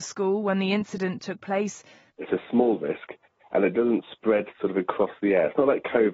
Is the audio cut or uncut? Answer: cut